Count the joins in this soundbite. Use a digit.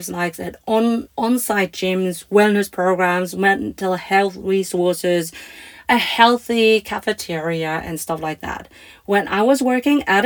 1